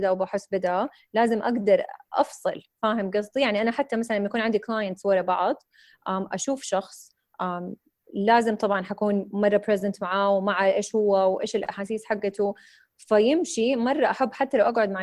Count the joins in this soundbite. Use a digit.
0